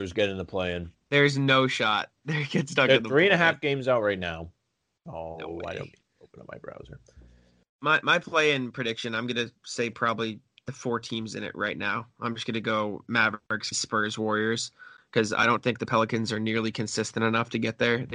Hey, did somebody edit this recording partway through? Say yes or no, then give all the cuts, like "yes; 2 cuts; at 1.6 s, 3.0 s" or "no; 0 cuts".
yes; 1 cut; at 13.7 s